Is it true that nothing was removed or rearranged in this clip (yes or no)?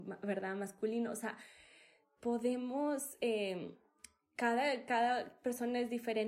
yes